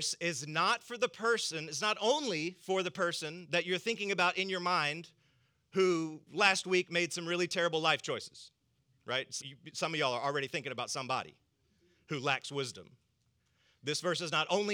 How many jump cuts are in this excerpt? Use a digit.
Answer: 1